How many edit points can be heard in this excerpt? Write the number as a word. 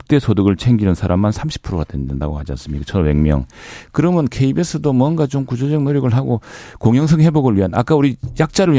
zero